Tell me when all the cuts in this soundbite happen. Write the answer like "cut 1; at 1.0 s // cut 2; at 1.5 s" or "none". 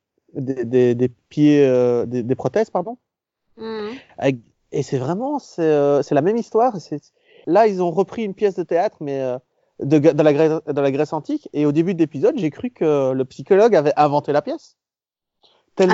cut 1; at 7.4 s